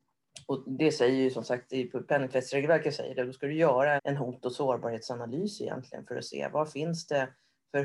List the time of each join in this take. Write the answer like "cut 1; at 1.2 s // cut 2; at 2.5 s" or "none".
cut 1; at 4.0 s